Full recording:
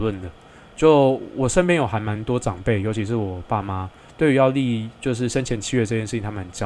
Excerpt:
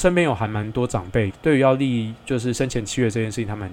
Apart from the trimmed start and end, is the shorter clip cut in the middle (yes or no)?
yes